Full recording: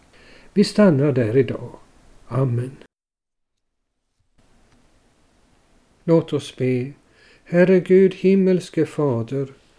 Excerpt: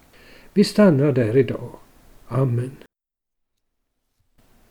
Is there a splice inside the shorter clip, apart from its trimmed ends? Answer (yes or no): no